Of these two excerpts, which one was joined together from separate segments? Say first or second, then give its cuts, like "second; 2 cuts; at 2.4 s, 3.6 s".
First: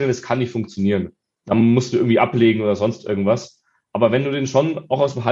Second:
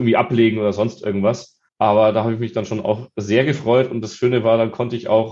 second; 1 cut; at 1.7 s